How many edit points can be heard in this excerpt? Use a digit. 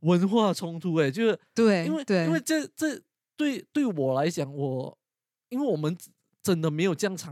0